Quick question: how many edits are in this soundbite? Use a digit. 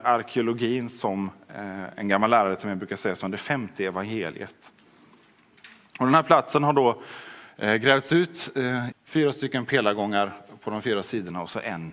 2